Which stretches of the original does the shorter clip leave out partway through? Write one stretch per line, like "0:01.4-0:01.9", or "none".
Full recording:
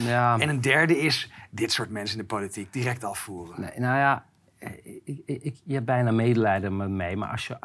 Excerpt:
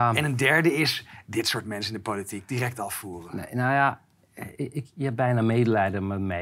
0:04.8-0:05.2